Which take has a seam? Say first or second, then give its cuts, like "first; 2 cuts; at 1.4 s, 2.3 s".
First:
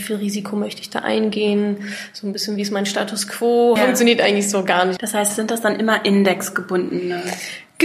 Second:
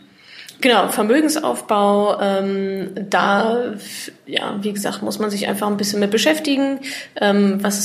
first; 2 cuts; at 3.8 s, 5.0 s